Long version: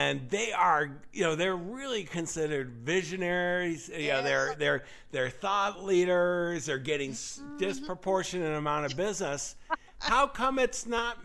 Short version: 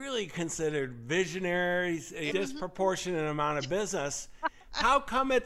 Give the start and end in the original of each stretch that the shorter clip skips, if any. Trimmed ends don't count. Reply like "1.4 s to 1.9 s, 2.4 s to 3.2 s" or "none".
4.1 s to 7.6 s